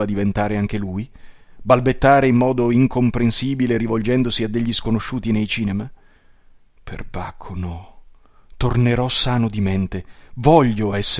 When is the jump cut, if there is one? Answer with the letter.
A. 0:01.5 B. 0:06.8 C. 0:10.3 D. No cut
B